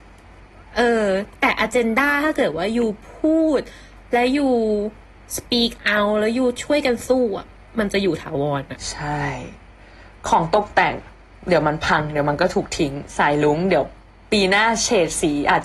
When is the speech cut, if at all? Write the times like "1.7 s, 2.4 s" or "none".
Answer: none